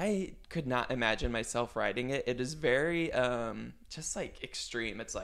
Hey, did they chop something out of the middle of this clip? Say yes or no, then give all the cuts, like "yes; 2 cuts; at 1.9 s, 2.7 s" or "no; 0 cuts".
no; 0 cuts